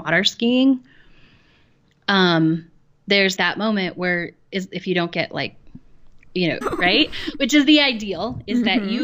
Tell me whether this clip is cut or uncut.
cut